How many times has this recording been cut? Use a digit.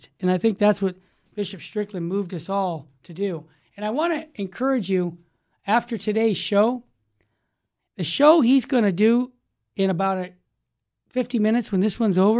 0